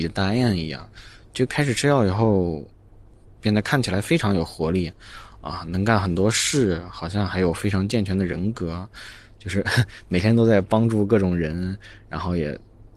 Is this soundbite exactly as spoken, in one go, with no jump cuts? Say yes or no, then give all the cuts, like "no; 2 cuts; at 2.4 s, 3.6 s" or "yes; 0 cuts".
yes; 0 cuts